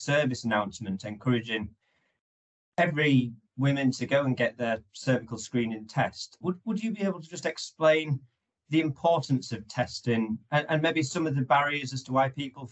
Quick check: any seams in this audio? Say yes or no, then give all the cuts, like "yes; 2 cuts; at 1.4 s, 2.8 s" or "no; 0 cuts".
yes; 1 cut; at 6.4 s